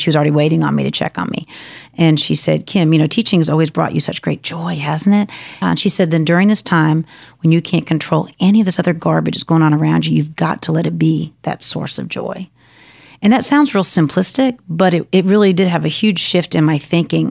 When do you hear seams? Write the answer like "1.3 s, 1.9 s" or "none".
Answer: 5.6 s